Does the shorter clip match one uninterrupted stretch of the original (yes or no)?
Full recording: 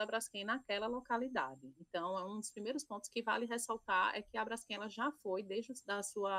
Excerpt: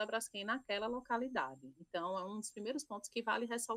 yes